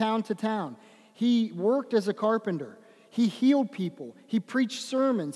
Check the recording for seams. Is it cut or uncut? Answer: uncut